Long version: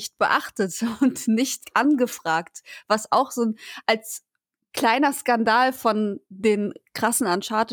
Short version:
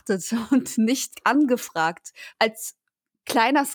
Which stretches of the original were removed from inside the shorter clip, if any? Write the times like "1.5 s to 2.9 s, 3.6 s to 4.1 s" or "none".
2.8 s to 3.8 s